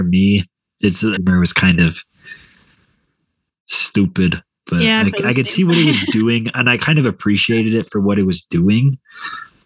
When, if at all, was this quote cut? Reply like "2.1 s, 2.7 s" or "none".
1.2 s